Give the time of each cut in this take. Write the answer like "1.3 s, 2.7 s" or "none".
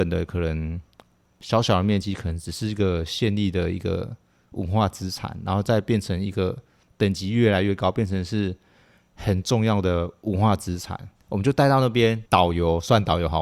11.2 s, 12.3 s